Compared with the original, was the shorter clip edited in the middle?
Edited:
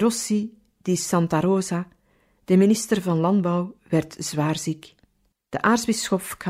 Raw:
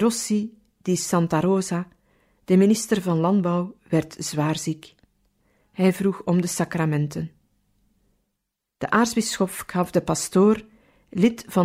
yes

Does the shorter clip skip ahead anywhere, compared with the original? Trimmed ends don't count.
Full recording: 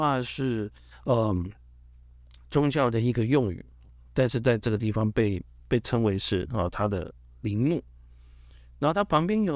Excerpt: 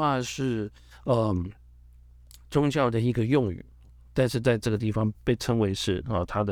yes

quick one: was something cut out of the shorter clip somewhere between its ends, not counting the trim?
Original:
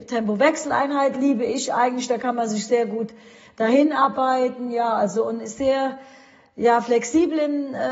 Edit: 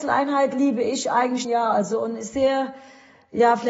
yes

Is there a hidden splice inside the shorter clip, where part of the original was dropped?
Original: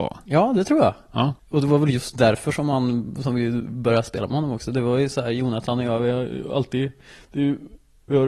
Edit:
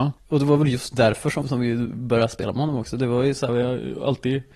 yes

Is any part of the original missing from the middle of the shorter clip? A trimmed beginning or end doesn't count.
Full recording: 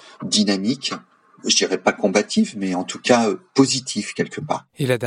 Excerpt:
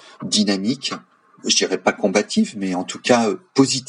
no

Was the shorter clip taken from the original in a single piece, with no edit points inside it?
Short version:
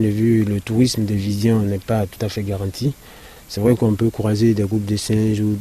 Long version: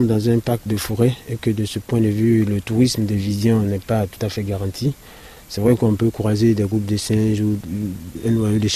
yes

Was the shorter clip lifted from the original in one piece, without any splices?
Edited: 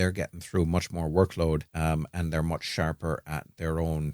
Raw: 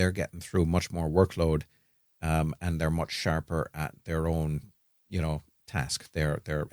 no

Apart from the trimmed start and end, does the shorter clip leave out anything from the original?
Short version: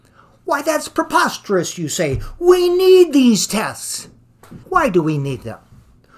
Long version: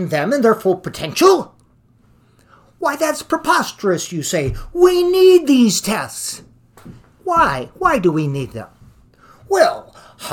yes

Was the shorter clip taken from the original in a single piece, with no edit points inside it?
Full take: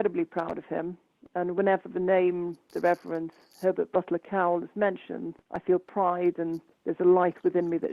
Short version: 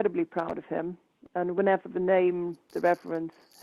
yes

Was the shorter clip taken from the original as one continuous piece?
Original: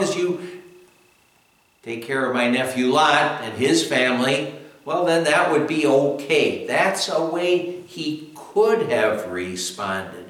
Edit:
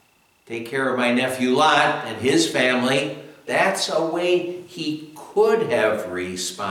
no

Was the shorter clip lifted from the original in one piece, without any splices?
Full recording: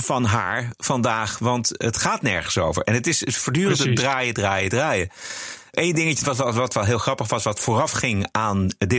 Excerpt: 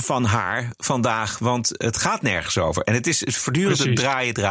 yes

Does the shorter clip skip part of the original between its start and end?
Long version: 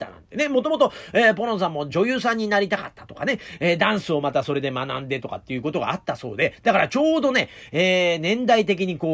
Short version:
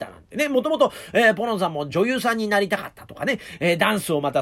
no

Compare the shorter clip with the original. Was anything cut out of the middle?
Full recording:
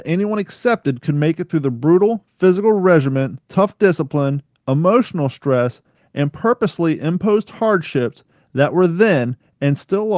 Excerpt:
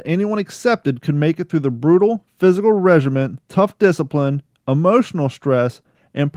no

